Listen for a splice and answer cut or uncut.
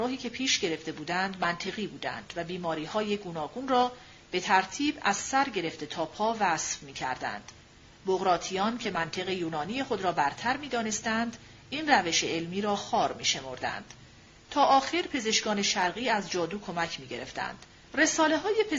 cut